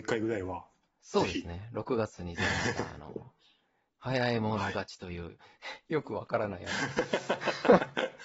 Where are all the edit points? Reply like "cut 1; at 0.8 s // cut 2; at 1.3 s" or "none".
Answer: none